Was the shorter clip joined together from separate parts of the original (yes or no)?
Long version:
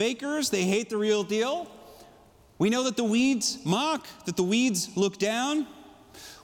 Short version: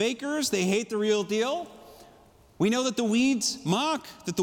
no